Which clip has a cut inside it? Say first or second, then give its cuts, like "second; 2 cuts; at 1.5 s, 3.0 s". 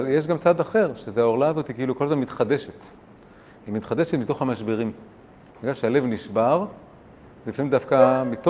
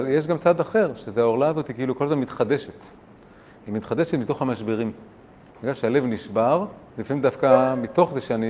second; 1 cut; at 6.9 s